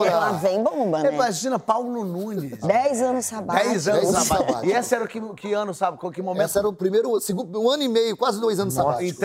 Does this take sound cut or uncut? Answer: cut